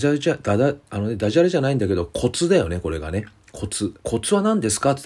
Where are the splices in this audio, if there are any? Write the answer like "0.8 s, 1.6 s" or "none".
4.0 s